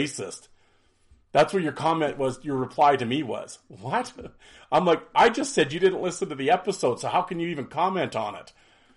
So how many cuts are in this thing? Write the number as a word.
zero